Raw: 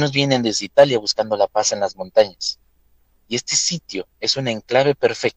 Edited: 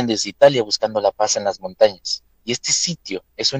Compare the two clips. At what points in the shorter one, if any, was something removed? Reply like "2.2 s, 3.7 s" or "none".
2.3 s

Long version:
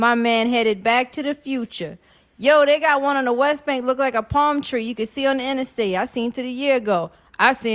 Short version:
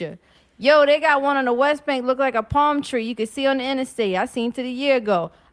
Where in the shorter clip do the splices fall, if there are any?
none

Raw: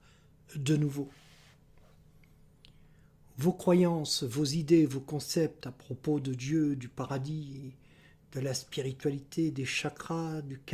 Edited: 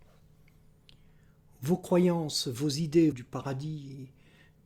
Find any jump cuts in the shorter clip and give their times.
3.1 s

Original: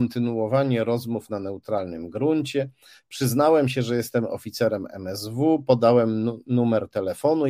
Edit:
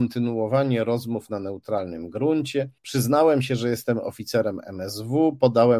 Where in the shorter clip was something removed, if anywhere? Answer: 2.8 s

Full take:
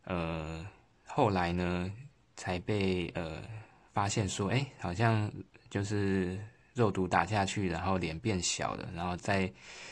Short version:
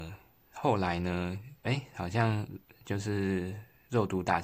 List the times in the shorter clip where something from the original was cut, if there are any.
1.6 s

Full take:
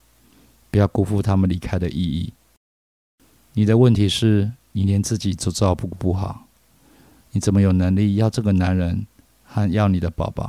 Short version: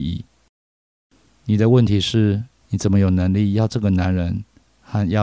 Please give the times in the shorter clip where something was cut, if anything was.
2.6 s

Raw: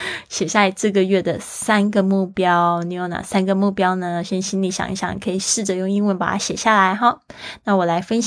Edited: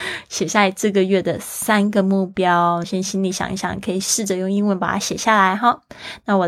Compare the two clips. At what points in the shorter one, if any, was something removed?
2.8 s

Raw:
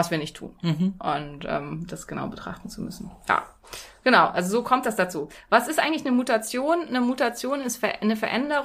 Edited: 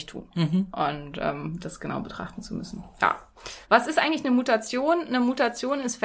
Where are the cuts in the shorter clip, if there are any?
3.6 s

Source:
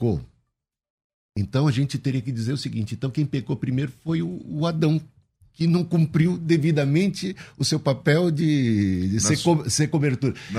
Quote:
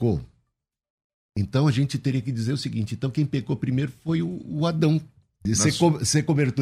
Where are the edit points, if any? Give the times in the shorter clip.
5.5 s

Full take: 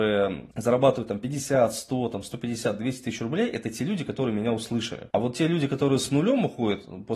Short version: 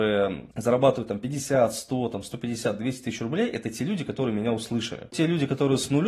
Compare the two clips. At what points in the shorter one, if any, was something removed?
5.1 s

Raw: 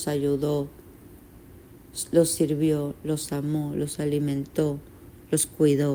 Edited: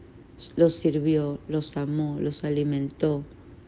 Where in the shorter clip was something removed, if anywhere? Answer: none

